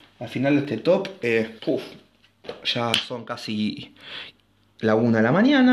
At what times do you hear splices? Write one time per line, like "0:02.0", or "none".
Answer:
0:01.6